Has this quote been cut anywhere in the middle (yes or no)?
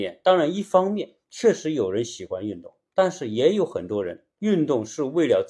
no